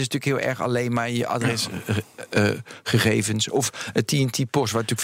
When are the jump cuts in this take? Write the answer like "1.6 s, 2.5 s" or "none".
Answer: none